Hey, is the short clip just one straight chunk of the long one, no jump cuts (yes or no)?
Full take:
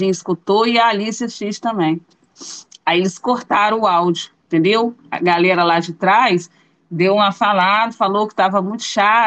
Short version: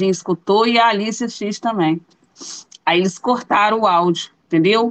yes